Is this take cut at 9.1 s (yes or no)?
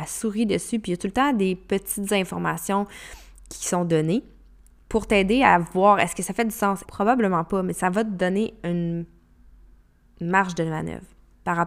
no